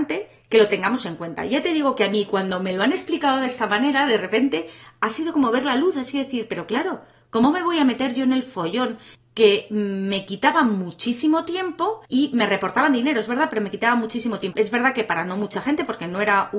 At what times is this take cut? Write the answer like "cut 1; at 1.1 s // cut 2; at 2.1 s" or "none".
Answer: cut 1; at 9.1 s // cut 2; at 12.1 s // cut 3; at 14.5 s